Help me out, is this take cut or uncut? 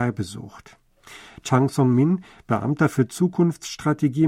uncut